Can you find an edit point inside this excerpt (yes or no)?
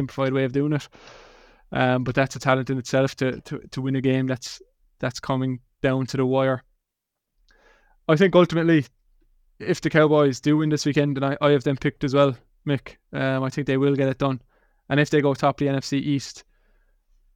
no